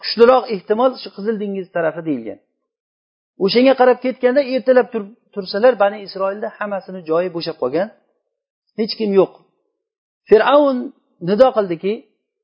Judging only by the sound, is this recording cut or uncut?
uncut